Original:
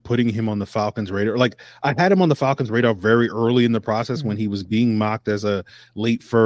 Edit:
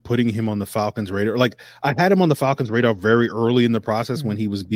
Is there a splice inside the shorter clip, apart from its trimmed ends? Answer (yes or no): no